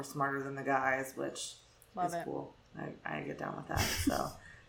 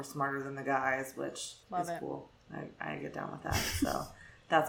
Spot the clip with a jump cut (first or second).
second